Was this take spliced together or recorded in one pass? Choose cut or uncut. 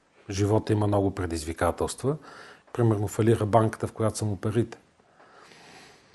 cut